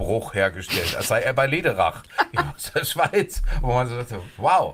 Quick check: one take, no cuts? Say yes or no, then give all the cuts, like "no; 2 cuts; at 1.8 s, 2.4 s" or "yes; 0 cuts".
yes; 0 cuts